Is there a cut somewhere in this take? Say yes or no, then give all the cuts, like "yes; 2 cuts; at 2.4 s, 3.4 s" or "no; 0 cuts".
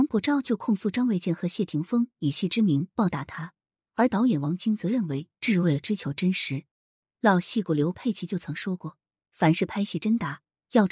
no; 0 cuts